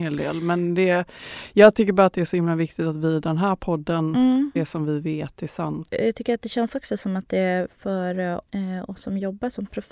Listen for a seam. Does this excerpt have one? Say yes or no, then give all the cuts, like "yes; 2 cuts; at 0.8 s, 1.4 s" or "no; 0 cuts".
yes; 2 cuts; at 4.6 s, 5.9 s